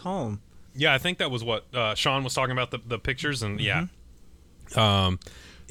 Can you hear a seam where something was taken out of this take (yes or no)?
no